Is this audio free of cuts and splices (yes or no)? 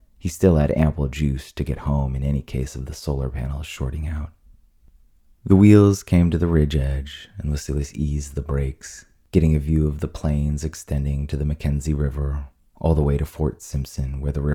yes